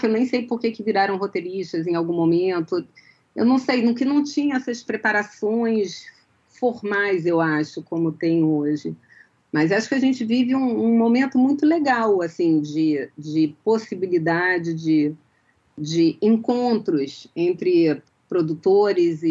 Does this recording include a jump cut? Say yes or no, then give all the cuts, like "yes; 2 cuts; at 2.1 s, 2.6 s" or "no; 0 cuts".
no; 0 cuts